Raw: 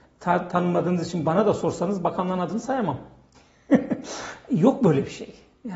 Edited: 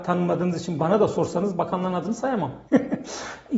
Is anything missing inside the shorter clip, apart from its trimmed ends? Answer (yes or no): yes